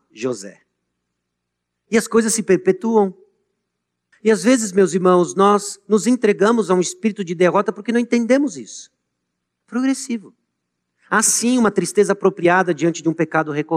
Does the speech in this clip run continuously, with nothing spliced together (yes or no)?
no